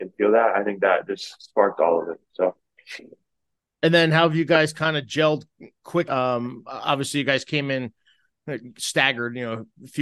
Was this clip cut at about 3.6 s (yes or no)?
no